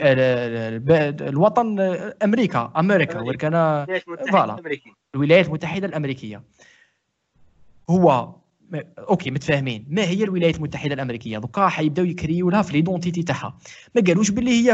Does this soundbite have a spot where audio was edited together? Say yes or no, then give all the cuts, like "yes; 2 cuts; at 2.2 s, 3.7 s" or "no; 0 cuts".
no; 0 cuts